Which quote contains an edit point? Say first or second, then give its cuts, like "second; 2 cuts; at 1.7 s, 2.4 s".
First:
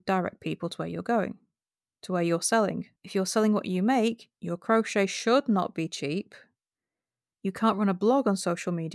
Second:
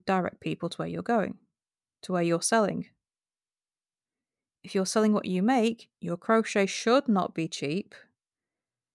first; 2 cuts; at 3.0 s, 7.3 s